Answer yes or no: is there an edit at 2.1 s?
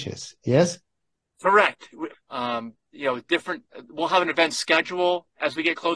yes